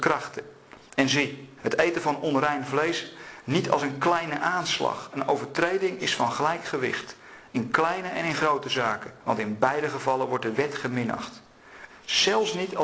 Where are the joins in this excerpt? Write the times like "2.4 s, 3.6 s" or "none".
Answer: 1.6 s, 9.2 s, 11.9 s